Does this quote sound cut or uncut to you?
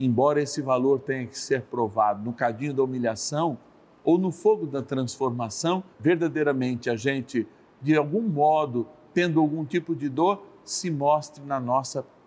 cut